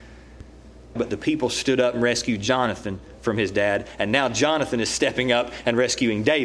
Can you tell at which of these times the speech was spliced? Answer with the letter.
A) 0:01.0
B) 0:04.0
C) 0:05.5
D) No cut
A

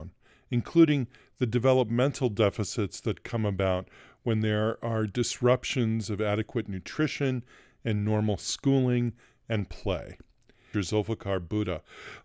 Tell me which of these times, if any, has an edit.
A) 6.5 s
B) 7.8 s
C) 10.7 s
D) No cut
C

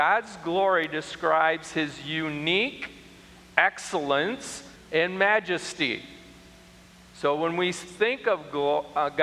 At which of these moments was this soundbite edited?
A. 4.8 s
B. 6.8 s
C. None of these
A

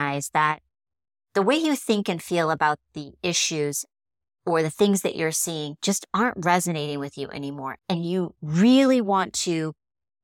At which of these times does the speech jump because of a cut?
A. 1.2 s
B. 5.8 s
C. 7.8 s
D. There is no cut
C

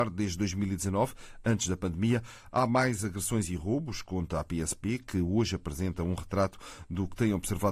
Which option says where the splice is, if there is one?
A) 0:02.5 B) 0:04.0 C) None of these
C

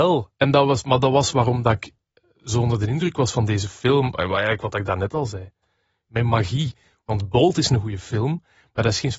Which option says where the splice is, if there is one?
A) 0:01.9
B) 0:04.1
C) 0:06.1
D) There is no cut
C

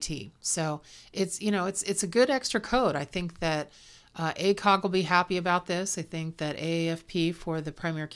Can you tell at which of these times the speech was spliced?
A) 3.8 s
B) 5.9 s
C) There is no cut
C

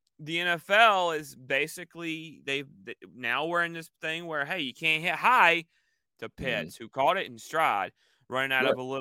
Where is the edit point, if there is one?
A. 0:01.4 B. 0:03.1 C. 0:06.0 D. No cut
C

